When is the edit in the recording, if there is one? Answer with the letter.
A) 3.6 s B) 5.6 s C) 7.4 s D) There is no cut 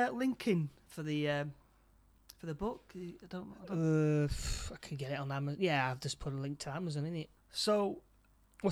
C